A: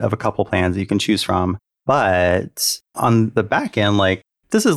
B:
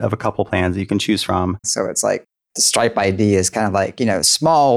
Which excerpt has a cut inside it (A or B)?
B